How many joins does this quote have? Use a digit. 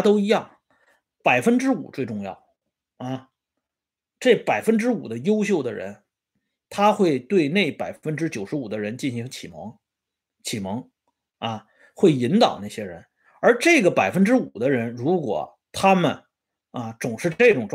0